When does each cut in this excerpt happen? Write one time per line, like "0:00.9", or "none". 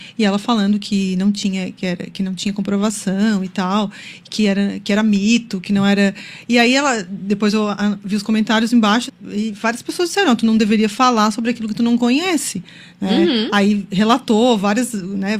0:09.1